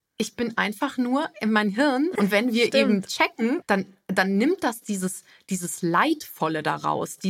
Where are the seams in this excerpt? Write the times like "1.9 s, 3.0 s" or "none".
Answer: 2.2 s, 3.6 s